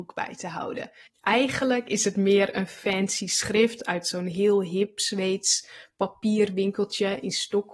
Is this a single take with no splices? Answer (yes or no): no